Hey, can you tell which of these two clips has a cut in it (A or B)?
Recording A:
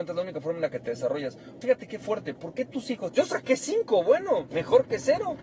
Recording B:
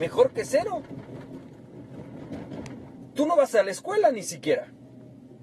A